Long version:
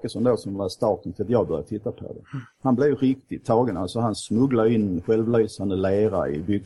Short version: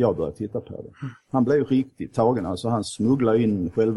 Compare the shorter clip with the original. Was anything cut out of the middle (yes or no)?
no